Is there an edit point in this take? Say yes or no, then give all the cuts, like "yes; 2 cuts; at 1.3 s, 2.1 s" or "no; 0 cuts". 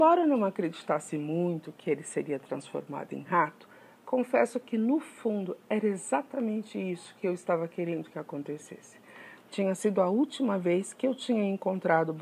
yes; 1 cut; at 9.4 s